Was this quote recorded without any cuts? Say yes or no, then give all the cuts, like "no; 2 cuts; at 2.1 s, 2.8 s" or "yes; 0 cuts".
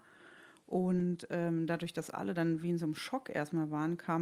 yes; 0 cuts